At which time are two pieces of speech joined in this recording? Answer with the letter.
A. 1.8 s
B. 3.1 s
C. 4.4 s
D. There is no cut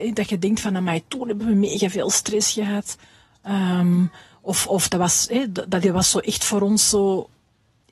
D